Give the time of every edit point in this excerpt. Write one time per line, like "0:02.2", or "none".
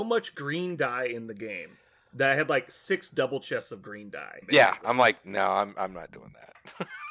0:04.4

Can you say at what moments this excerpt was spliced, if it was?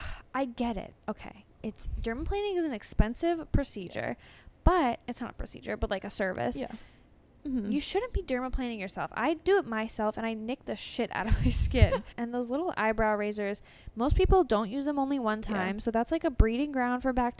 0:07.4
0:12.1

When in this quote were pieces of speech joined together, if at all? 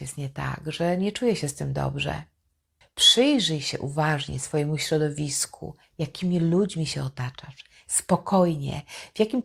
0:02.8
0:07.8

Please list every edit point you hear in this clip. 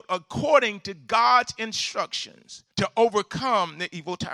0:02.7

